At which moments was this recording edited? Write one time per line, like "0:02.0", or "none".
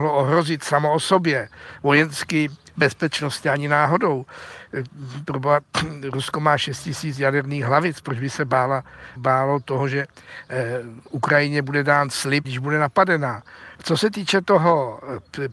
0:09.2
0:12.4
0:13.7